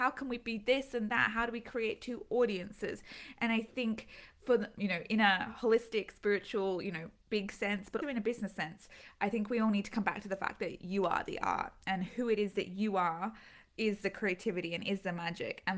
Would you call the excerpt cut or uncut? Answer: cut